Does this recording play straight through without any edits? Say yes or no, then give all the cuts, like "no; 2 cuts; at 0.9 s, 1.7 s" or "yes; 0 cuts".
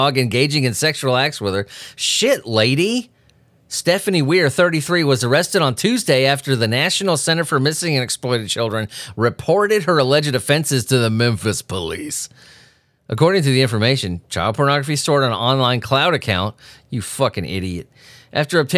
yes; 0 cuts